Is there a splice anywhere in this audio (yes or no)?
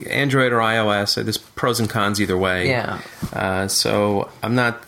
no